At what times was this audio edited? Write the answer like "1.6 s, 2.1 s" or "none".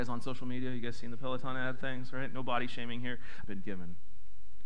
3.4 s